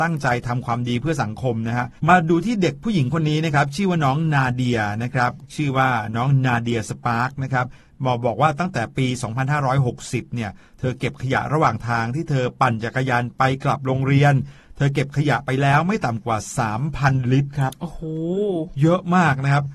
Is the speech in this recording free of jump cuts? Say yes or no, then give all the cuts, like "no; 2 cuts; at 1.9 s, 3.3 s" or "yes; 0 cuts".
no; 1 cut; at 2.0 s